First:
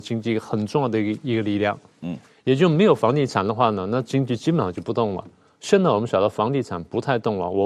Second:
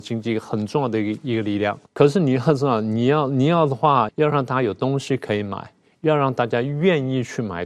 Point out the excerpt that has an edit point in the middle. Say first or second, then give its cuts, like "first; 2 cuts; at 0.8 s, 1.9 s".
second; 2 cuts; at 1.9 s, 4.1 s